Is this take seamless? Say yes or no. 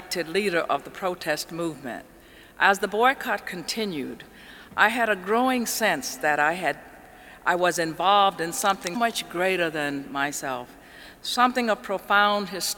no